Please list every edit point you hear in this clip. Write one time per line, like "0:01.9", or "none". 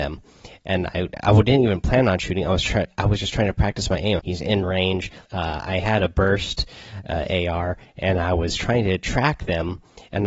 0:04.2
0:05.3